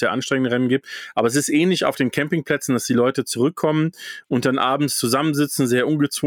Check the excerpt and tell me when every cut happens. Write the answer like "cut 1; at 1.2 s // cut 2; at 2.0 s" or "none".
none